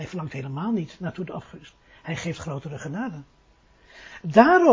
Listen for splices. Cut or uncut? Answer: uncut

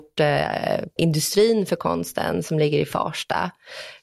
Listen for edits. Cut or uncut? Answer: cut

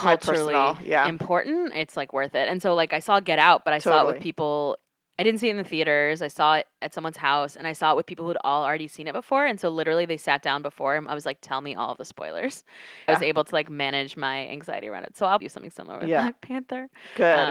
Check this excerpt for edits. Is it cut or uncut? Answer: cut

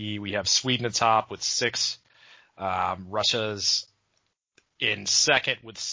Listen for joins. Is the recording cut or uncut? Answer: uncut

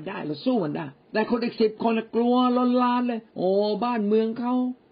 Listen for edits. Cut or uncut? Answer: cut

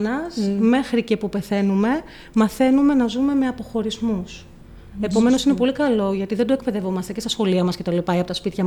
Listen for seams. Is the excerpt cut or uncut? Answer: uncut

